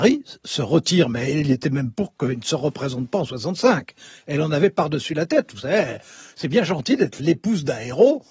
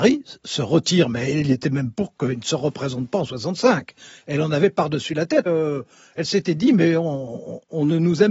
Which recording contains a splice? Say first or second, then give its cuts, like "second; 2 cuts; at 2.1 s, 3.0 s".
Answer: second; 1 cut; at 5.5 s